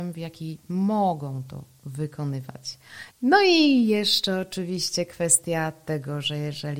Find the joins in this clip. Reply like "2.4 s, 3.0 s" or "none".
3.1 s